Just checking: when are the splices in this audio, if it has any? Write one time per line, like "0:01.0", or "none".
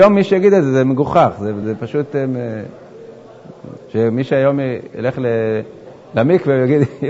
0:01.6
0:03.8